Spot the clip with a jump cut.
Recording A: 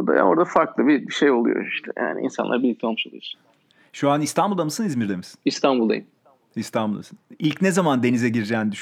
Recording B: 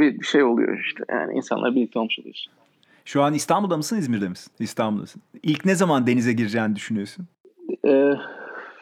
B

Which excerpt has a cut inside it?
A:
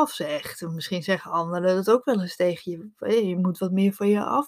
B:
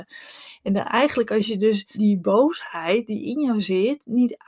B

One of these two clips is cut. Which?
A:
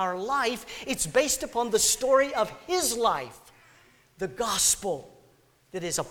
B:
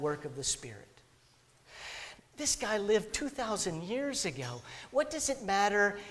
B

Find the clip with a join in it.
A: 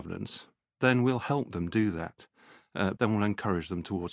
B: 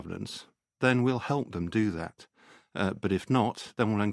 A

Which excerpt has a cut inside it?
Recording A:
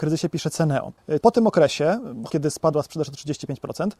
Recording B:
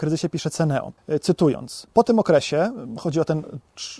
A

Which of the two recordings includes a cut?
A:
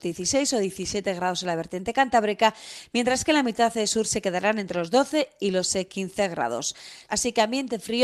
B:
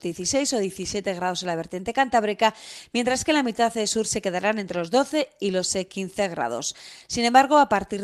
A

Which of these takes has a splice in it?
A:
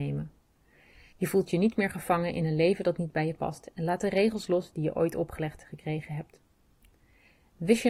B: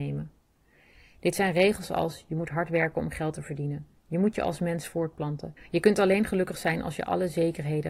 A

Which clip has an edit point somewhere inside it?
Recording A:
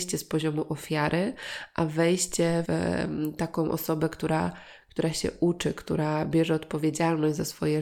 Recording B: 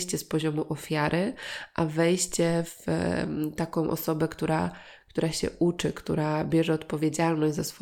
A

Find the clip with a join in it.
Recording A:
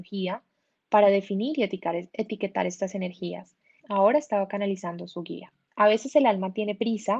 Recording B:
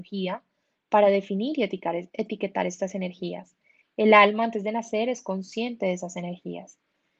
A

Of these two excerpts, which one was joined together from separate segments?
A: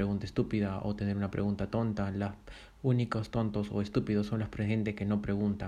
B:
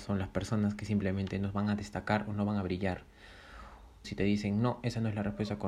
B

